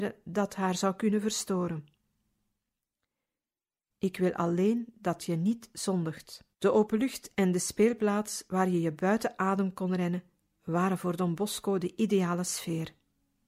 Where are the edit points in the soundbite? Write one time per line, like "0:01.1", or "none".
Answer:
0:03.9
0:06.5

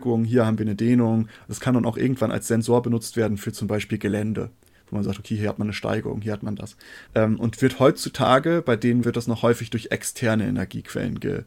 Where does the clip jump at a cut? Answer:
0:07.1
0:09.0

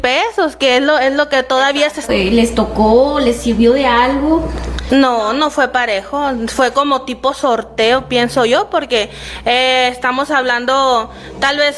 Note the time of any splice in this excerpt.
0:02.1
0:04.9

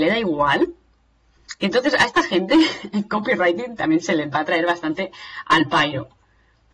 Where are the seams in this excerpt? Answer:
none

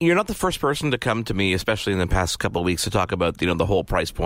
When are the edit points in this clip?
none

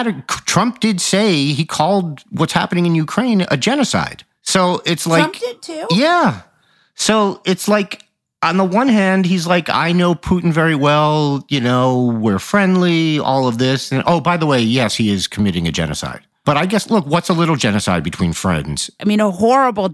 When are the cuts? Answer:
0:19.0

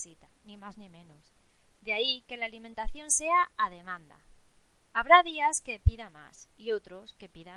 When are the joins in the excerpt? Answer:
none

